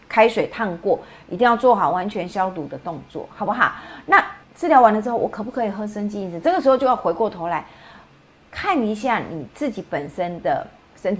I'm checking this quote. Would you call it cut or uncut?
cut